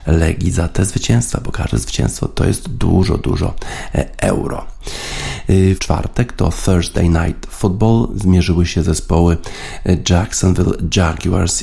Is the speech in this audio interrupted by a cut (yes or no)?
yes